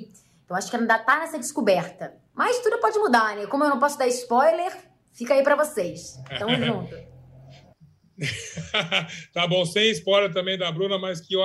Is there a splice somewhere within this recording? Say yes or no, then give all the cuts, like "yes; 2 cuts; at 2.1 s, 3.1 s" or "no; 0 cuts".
yes; 1 cut; at 2.3 s